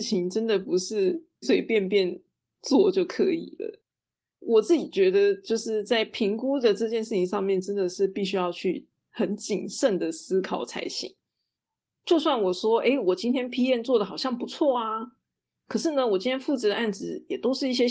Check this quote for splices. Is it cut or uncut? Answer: cut